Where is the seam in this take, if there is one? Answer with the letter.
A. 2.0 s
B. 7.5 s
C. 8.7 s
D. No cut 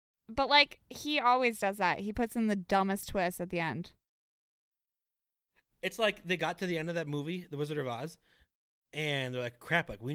D